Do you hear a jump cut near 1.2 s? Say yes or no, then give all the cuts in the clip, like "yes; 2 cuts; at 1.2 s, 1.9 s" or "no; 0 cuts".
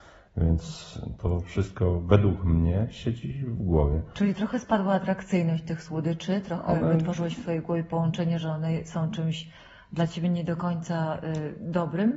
yes; 1 cut; at 1.2 s